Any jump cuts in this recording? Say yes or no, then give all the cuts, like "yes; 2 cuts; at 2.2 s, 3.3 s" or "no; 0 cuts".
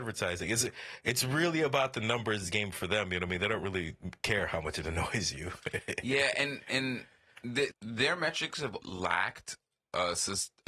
yes; 2 cuts; at 7.7 s, 8.8 s